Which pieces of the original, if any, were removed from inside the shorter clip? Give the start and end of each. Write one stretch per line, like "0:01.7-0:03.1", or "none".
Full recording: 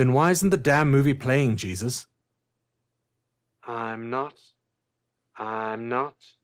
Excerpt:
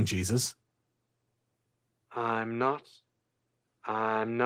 none